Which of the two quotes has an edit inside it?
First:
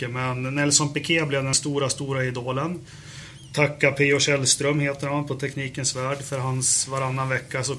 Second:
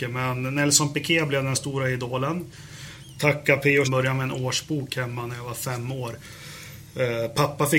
second; 2 cuts; at 1.5 s, 3.8 s

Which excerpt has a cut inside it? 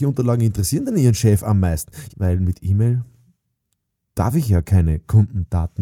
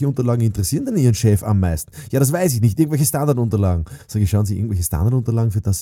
first; 1 cut; at 2.1 s

